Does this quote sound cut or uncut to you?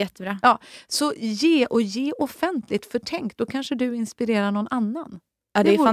uncut